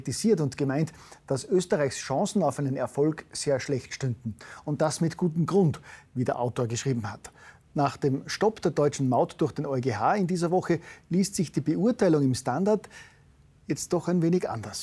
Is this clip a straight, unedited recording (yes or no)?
no